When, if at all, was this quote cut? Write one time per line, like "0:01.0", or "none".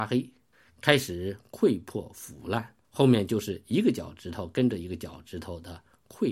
0:02.8